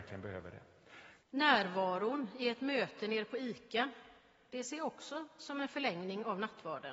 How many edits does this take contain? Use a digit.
1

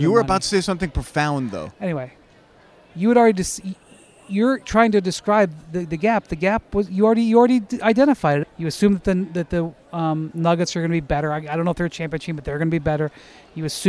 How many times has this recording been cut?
1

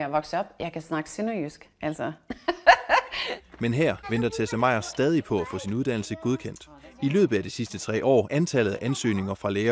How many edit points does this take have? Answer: 2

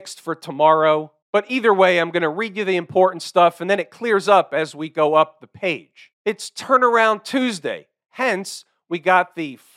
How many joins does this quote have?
0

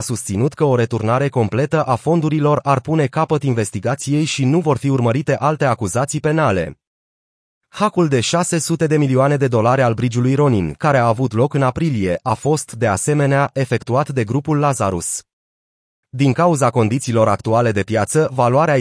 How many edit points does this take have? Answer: 0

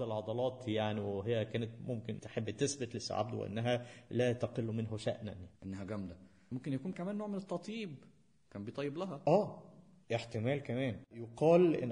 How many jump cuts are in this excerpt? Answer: 1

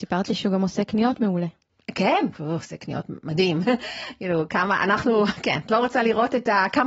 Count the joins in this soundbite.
1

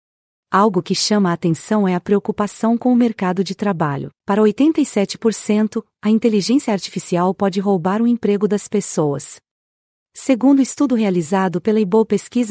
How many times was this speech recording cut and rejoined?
2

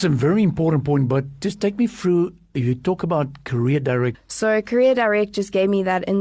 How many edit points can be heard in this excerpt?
1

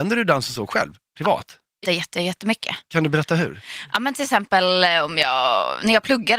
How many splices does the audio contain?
1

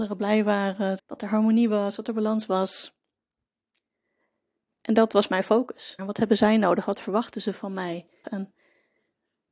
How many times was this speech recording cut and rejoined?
3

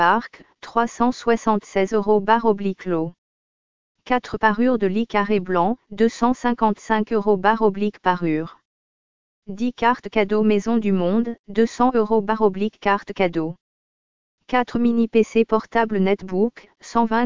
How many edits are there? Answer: 0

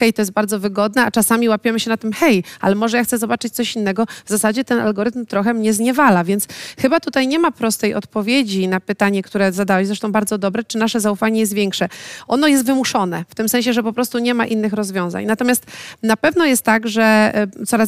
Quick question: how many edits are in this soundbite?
0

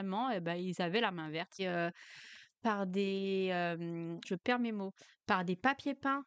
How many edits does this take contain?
2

